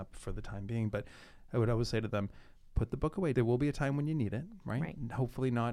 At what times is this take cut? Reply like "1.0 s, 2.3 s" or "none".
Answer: 3.3 s